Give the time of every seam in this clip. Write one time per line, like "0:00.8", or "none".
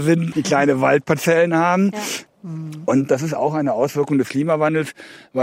0:02.3